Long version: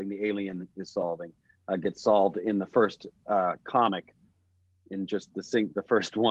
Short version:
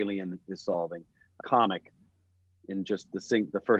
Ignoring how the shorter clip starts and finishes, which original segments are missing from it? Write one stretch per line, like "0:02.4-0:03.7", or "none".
0:01.7-0:03.6